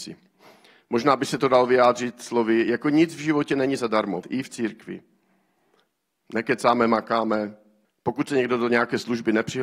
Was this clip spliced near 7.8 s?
yes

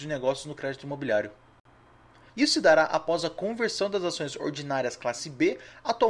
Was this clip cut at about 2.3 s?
yes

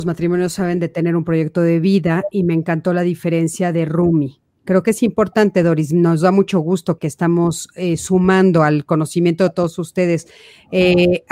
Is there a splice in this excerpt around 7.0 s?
yes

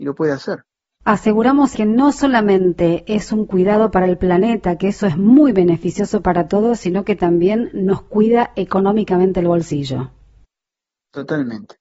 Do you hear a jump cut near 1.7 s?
yes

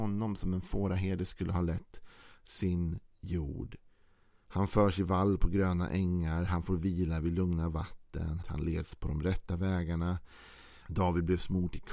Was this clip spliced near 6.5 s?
no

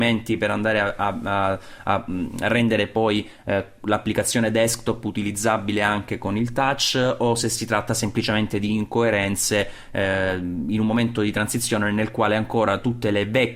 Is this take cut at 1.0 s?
no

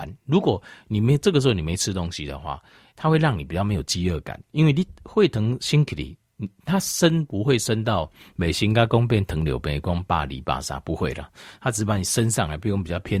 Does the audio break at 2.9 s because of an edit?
yes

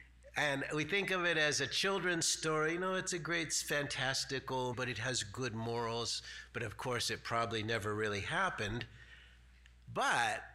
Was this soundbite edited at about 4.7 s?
yes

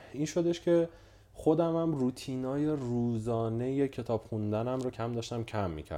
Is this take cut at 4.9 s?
yes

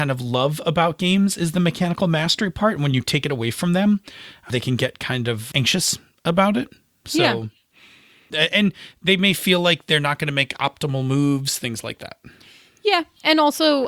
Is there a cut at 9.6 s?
no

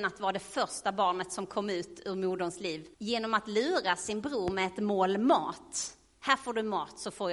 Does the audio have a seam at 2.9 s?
yes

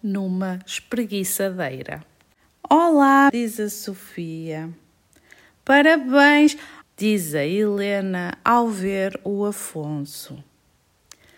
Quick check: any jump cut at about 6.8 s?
yes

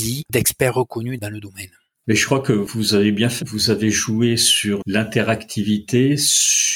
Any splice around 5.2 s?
no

